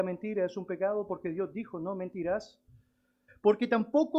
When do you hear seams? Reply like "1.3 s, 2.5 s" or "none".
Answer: 3.3 s